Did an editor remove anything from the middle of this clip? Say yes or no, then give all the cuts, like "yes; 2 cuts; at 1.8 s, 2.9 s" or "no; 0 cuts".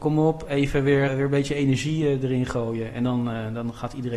yes; 1 cut; at 1.1 s